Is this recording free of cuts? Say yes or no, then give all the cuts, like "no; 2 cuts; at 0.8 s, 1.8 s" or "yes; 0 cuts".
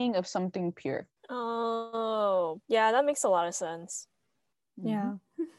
no; 2 cuts; at 1.2 s, 2.6 s